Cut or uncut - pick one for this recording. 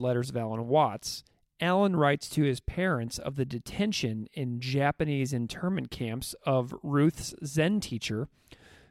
uncut